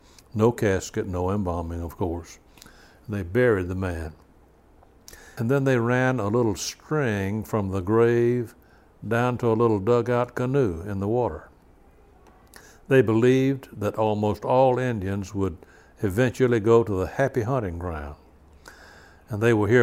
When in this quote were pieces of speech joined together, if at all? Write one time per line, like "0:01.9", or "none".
0:05.4